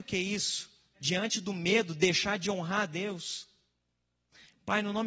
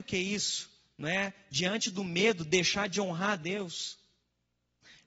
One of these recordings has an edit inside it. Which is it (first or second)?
first